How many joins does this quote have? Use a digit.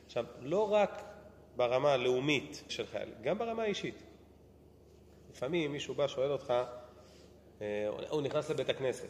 1